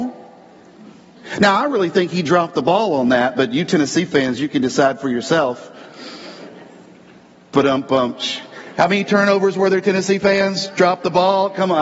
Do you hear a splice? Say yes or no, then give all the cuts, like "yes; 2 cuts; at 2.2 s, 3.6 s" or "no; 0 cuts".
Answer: no; 0 cuts